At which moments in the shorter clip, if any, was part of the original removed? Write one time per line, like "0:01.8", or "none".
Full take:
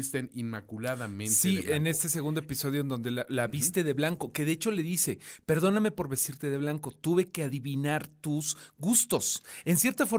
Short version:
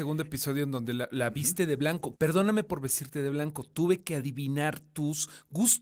0:02.2